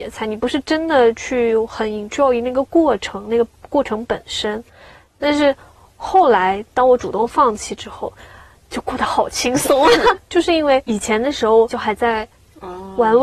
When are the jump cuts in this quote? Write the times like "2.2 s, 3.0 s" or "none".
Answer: 10.2 s, 11.7 s